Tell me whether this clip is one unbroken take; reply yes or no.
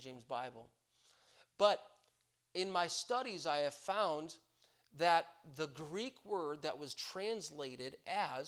yes